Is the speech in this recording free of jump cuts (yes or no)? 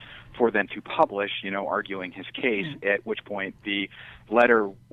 yes